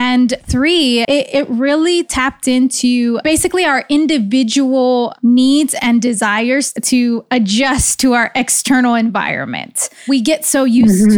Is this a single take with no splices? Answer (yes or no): no